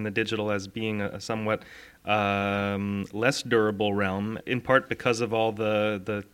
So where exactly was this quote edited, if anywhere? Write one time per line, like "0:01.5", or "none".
0:04.4